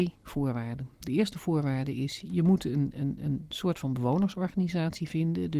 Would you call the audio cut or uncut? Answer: uncut